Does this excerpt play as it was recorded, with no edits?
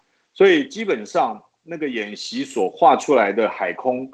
yes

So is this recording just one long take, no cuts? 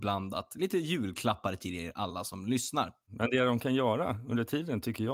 yes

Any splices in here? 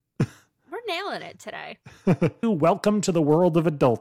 yes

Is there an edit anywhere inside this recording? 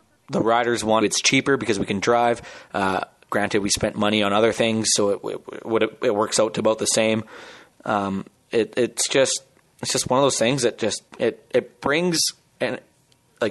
yes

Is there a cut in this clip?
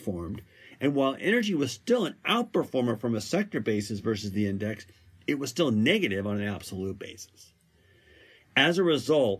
no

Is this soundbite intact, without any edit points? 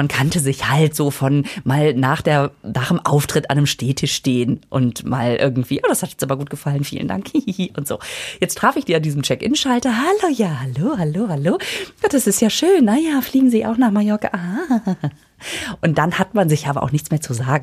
yes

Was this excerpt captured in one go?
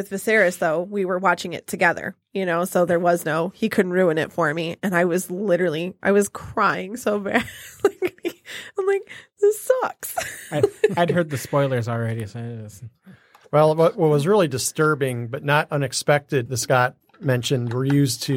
no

